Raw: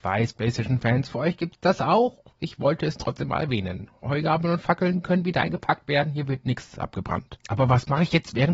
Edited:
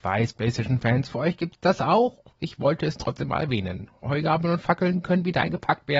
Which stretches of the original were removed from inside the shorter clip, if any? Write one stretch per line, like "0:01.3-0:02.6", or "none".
none